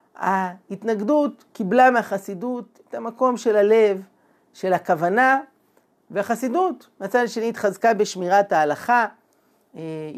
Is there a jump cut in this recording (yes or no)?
no